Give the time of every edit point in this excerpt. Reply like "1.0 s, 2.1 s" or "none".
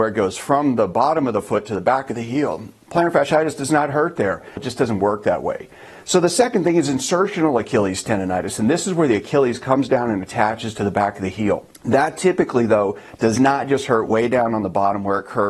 4.6 s